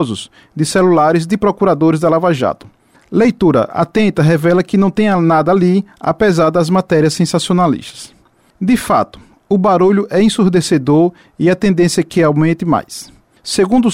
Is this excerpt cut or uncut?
uncut